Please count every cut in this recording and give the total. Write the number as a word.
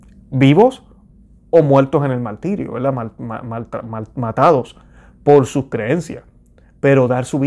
zero